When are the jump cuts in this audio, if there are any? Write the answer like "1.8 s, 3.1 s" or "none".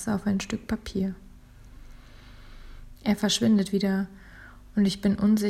2.9 s